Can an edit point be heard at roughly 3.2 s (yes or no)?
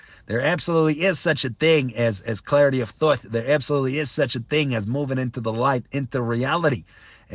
no